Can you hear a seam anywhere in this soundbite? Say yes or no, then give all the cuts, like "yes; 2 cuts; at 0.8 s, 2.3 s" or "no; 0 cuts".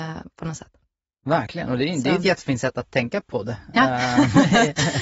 no; 0 cuts